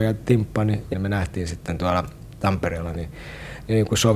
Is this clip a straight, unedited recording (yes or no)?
no